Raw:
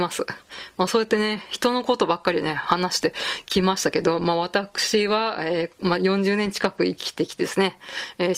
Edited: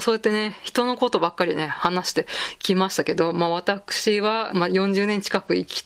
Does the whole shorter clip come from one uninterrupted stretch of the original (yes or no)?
no